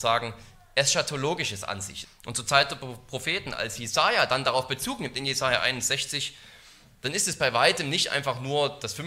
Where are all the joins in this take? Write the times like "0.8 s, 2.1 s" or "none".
2.0 s